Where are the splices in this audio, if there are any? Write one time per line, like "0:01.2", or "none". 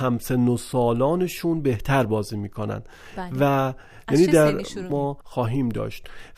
0:04.9

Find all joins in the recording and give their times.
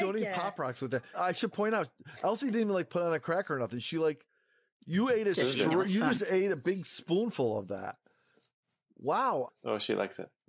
0:09.5

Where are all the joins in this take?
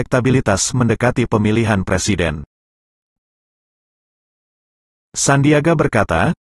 0:05.0

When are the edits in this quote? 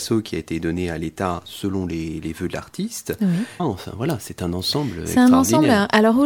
0:03.6

